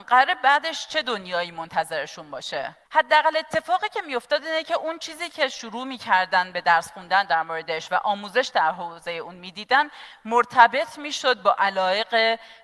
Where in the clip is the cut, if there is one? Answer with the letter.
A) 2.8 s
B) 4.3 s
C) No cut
A